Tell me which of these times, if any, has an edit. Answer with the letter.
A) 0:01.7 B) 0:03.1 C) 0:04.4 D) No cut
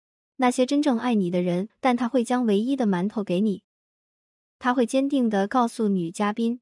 A